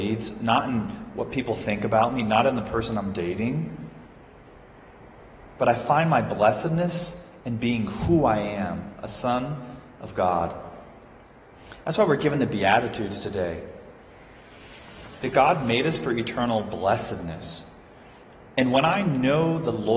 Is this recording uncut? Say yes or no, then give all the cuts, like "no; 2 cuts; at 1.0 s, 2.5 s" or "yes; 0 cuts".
yes; 0 cuts